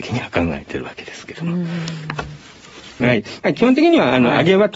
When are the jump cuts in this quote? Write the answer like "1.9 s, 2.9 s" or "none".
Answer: 3.0 s